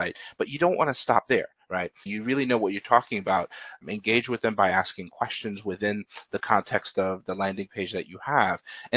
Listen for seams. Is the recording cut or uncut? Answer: cut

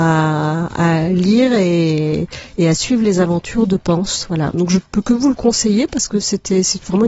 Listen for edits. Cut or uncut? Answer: uncut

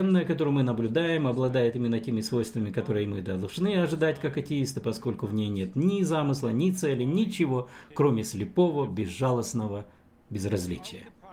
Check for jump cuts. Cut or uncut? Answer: uncut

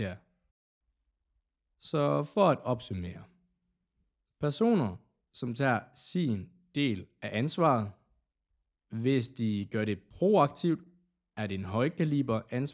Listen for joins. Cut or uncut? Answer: uncut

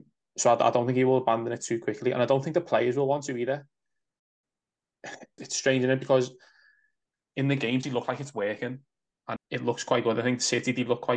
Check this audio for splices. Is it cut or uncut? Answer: cut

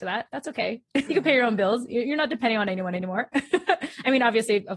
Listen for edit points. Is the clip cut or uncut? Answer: cut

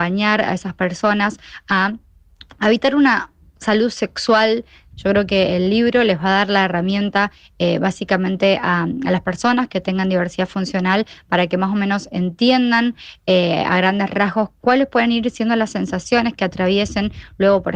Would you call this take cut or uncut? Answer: cut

